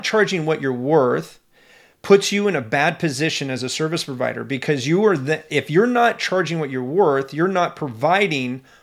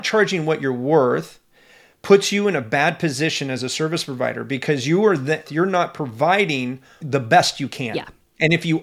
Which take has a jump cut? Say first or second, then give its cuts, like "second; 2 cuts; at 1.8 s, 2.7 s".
second; 1 cut; at 5.5 s